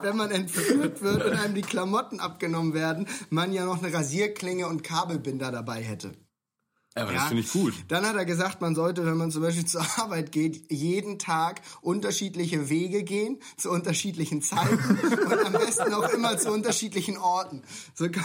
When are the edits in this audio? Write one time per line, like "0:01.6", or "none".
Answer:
none

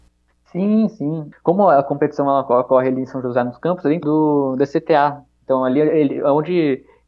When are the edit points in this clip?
0:01.3
0:04.0

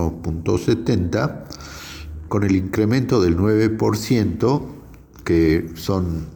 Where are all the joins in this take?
0:02.3

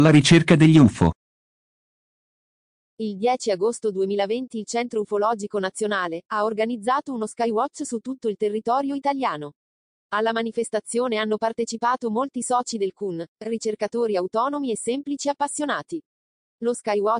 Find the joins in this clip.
none

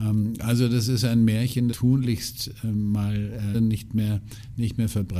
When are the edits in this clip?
0:01.7
0:03.5

